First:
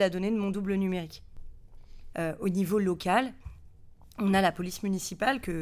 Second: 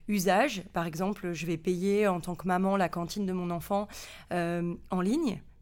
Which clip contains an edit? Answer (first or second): first